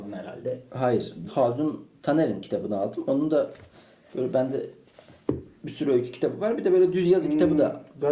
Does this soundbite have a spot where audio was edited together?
yes; 1 cut; at 1.3 s

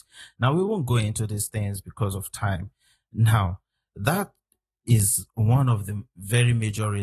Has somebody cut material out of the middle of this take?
no; 0 cuts

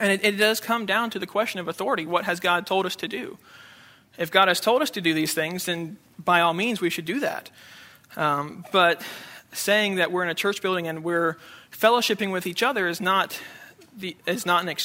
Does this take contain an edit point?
no; 0 cuts

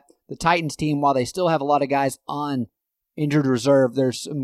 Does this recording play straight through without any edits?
yes; 0 cuts

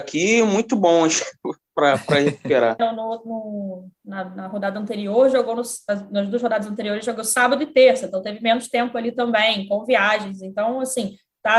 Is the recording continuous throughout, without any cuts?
no; 1 cut; at 2.8 s

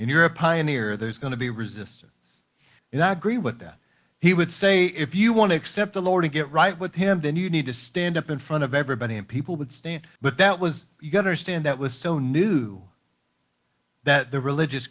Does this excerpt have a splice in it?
yes; 2 cuts; at 2.8 s, 10.2 s

